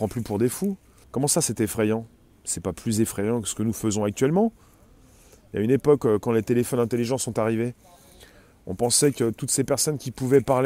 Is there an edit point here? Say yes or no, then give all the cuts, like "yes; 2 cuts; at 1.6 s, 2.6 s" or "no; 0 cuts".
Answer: yes; 1 cut; at 1.0 s